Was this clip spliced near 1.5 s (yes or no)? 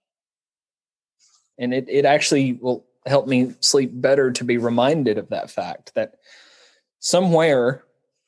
yes